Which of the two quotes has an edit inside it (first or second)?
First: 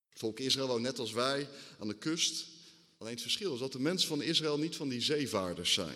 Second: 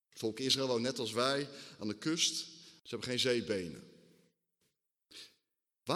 second